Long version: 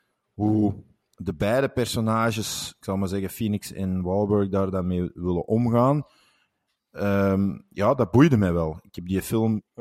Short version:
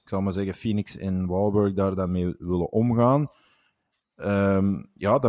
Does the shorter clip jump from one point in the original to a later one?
no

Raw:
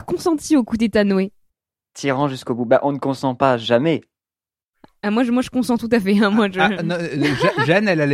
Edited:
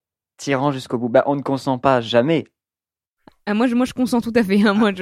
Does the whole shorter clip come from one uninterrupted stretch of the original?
yes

